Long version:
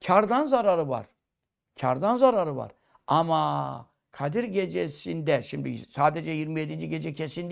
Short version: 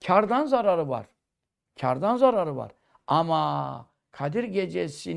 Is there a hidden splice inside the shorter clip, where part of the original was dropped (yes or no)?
no